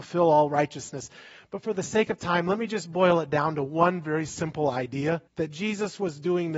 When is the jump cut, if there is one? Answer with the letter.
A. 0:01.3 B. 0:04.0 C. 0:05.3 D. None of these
C